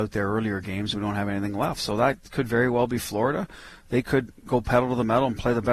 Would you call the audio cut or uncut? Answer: uncut